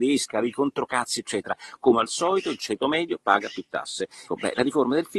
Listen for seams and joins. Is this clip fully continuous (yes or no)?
no